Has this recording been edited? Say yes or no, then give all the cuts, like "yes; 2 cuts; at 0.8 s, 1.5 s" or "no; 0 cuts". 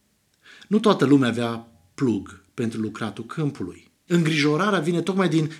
yes; 1 cut; at 4.1 s